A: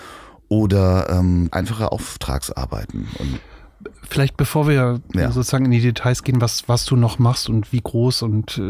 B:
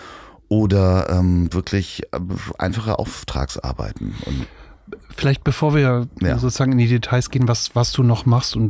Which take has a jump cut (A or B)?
A